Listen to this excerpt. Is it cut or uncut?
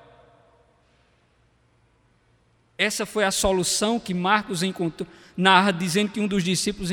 uncut